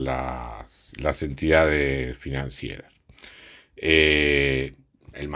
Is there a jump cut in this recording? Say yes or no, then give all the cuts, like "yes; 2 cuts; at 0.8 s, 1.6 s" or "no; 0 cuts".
no; 0 cuts